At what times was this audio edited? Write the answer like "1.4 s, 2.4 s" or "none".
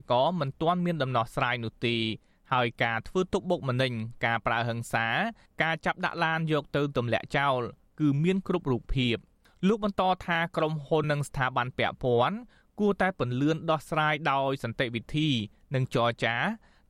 11.0 s